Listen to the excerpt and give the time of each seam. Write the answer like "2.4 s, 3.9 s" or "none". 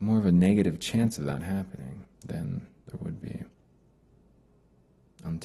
2.1 s